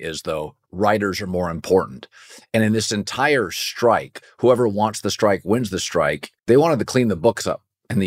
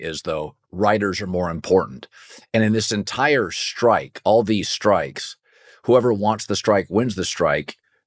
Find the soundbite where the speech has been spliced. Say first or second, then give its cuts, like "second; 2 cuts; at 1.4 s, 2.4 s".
first; 2 cuts; at 4.2 s, 6.4 s